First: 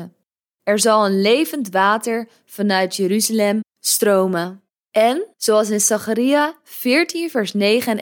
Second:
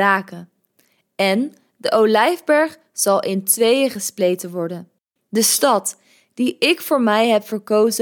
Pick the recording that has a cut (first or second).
second